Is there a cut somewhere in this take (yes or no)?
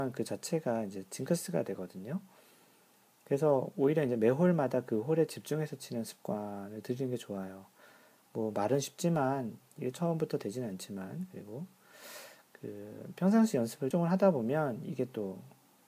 yes